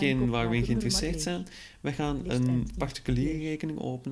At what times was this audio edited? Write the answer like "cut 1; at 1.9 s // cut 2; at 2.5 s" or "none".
none